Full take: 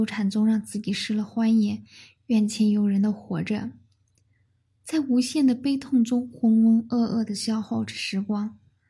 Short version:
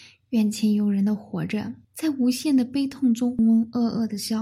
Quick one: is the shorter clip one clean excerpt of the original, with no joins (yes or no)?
no